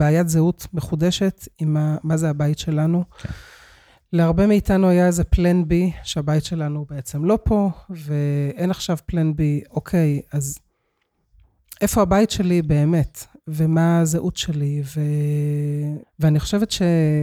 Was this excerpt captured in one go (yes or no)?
no